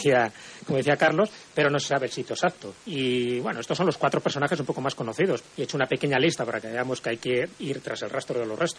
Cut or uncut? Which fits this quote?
cut